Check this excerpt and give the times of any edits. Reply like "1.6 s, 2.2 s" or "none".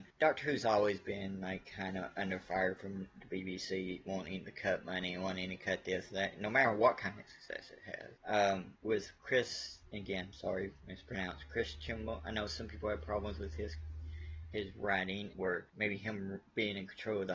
15.3 s